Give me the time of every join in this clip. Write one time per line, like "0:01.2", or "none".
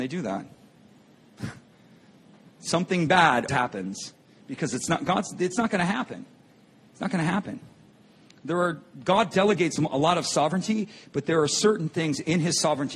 0:03.5